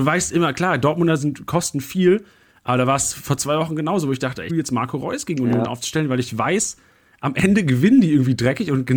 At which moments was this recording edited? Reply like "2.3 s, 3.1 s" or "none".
4.5 s